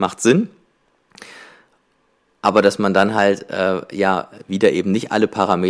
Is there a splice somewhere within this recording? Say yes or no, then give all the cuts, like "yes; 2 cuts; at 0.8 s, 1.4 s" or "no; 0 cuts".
no; 0 cuts